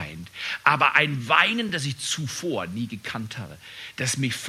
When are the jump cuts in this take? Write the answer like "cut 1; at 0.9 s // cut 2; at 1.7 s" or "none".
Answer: none